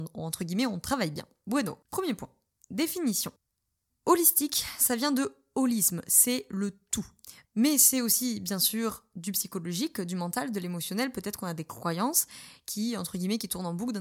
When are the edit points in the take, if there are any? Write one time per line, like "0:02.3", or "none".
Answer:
0:01.8
0:07.4